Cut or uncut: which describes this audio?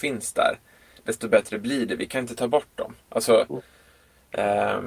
uncut